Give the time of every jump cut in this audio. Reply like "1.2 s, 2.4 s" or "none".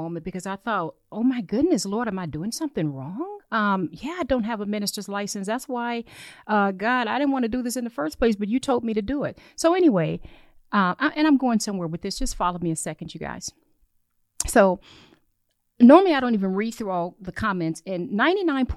none